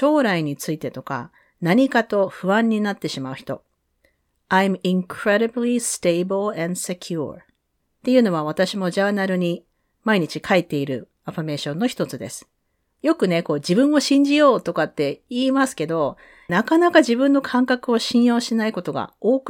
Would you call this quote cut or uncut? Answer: cut